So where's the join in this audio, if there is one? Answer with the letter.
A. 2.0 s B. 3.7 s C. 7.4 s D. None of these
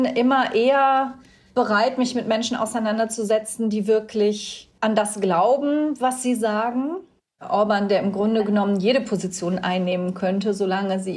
C